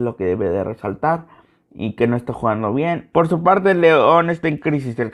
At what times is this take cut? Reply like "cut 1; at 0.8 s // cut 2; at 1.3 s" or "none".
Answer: cut 1; at 3.1 s